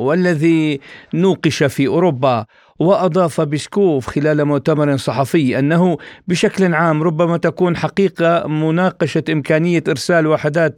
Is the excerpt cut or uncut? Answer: uncut